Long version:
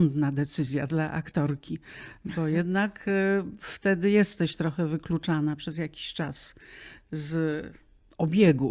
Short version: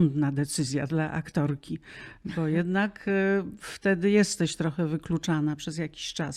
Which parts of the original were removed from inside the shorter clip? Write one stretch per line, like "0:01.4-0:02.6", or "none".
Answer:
none